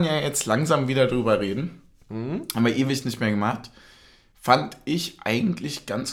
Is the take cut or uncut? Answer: uncut